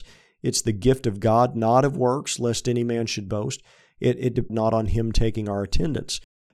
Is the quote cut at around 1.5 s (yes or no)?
no